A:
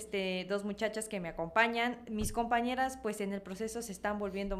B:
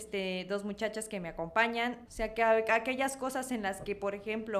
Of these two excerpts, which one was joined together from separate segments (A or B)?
B